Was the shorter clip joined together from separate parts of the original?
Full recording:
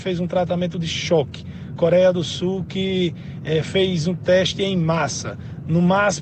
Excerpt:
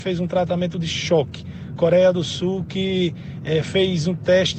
no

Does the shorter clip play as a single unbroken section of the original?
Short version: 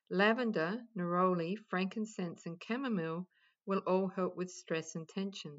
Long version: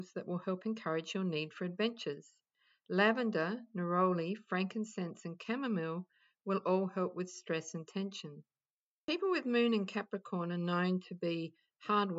yes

